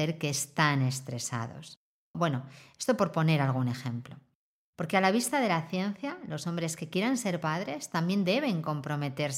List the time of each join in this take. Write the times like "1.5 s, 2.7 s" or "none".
2.1 s